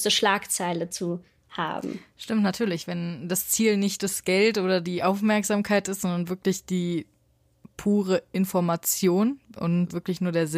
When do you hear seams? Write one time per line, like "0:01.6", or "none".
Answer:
none